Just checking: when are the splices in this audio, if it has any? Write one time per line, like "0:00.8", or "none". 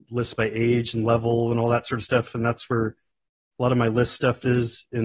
none